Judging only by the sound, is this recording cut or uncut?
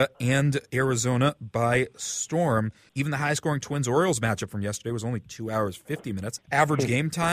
cut